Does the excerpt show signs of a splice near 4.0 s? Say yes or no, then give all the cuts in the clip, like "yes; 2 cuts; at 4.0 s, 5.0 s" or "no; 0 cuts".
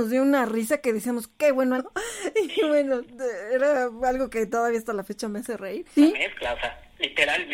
no; 2 cuts; at 1.8 s, 6.0 s